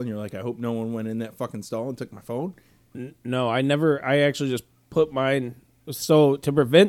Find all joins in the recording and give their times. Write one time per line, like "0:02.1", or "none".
none